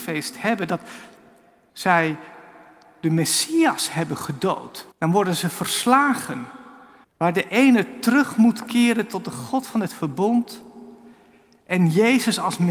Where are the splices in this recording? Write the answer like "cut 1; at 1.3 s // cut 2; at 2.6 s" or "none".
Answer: cut 1; at 1.7 s // cut 2; at 4.9 s // cut 3; at 7.0 s